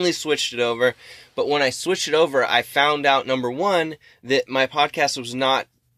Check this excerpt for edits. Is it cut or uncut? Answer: uncut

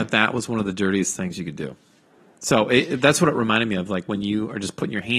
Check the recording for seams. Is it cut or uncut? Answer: uncut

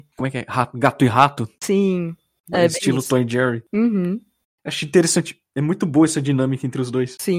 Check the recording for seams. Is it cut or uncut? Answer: uncut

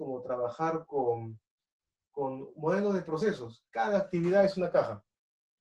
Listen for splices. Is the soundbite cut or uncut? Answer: uncut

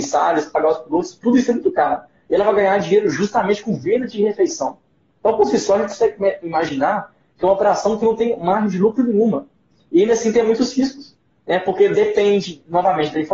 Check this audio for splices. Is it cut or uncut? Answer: uncut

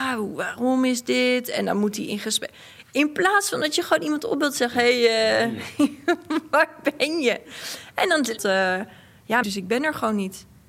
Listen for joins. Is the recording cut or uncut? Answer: cut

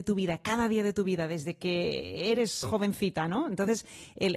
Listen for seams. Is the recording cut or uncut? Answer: cut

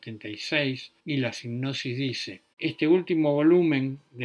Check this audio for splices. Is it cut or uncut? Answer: cut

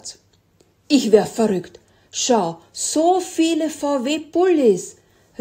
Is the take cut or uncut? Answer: uncut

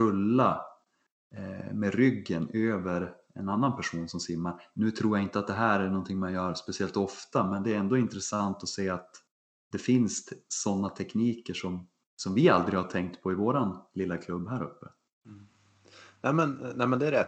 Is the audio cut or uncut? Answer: uncut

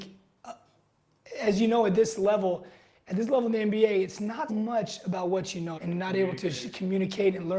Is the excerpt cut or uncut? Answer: cut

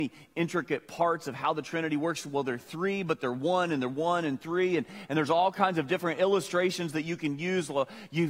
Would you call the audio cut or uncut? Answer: uncut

